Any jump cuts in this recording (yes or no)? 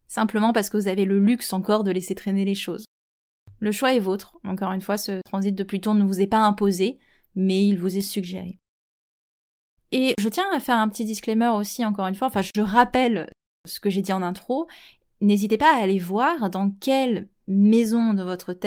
no